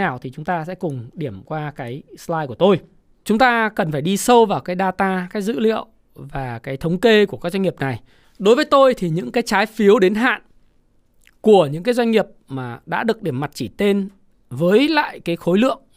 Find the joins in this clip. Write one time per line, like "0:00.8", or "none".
0:03.2
0:08.2